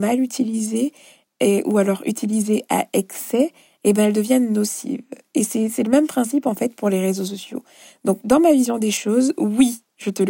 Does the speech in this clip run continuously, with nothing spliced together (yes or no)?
yes